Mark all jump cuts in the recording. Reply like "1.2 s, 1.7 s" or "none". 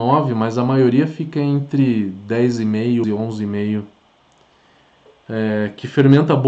3.0 s